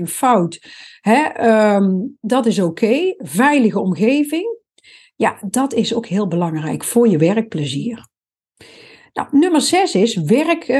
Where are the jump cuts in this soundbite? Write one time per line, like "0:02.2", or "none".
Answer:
none